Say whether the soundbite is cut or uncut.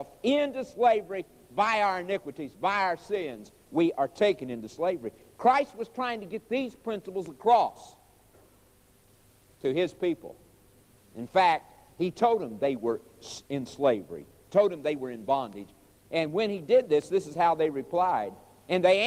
uncut